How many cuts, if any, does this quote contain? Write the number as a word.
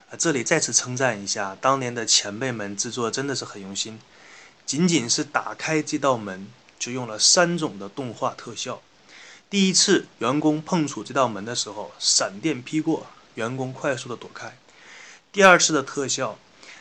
zero